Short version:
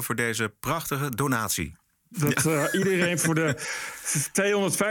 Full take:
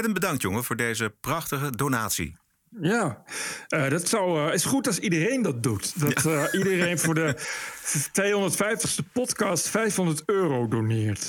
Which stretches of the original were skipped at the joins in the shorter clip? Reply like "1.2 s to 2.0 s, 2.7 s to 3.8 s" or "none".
2.7 s to 5.9 s